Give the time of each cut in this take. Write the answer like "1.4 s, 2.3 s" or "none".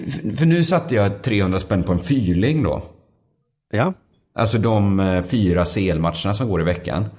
none